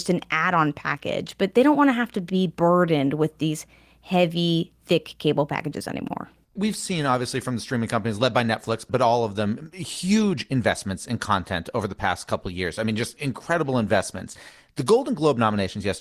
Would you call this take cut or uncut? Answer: uncut